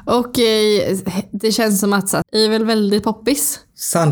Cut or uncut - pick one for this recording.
cut